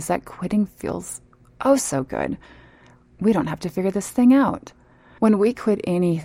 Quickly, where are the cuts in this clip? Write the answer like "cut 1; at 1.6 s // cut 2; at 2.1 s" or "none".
cut 1; at 5.2 s